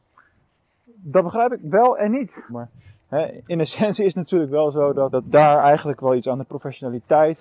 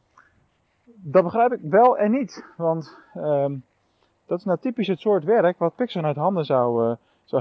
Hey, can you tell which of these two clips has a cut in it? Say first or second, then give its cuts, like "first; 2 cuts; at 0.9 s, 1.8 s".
first; 2 cuts; at 2.5 s, 5.1 s